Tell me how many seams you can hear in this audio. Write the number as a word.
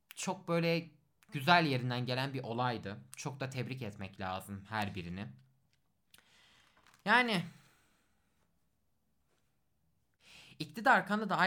zero